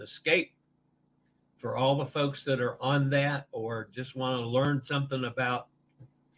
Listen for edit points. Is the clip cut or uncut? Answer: uncut